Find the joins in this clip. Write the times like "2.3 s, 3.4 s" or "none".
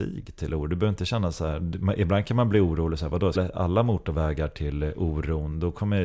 3.4 s